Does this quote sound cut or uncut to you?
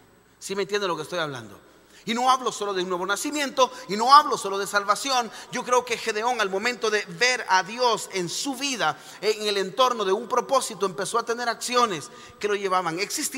cut